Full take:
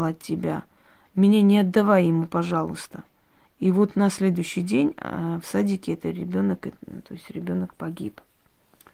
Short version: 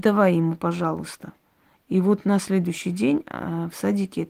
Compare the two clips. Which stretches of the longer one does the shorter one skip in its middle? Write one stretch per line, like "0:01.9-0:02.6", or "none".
none